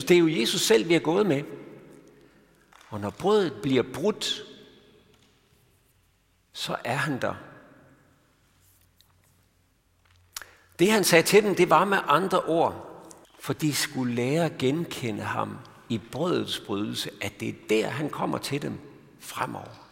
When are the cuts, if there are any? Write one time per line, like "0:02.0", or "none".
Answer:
0:02.7
0:13.2